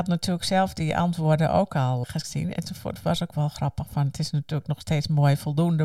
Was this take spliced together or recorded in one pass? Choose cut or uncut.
cut